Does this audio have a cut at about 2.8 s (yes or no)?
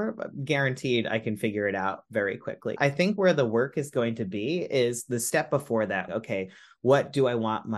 yes